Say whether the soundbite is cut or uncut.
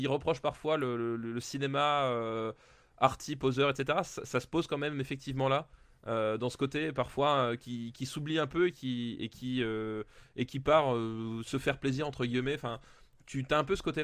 uncut